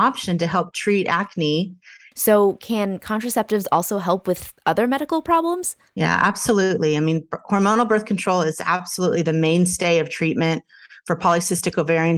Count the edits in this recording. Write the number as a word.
one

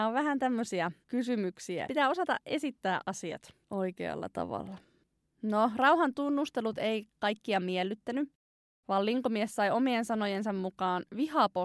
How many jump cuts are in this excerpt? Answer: one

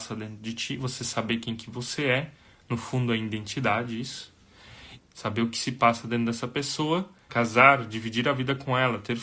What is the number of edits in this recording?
two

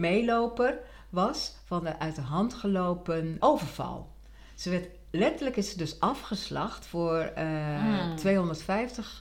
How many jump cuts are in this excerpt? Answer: one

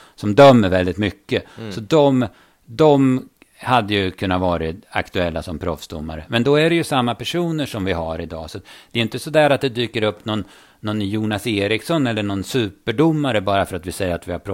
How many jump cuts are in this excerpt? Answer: zero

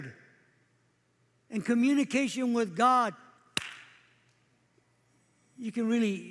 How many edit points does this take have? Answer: zero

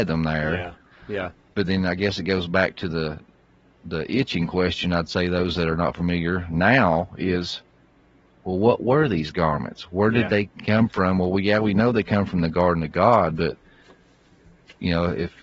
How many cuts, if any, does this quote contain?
zero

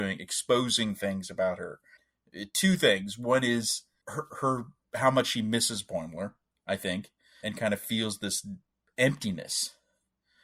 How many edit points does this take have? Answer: one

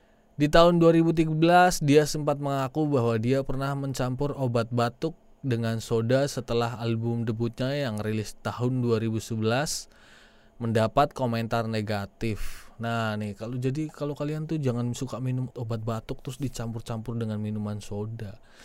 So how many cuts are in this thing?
one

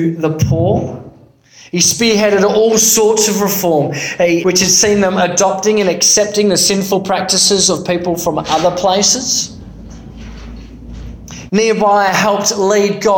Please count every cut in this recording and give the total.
two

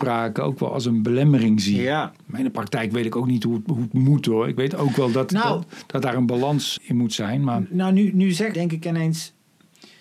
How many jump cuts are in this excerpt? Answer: two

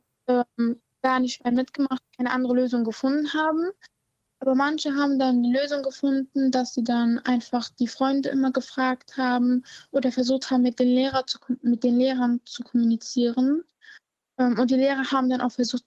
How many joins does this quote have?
one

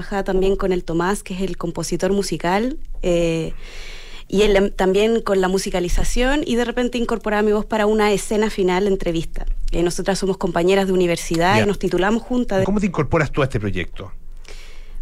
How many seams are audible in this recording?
two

